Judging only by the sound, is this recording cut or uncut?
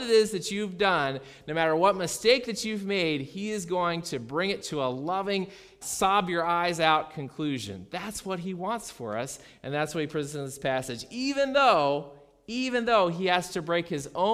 cut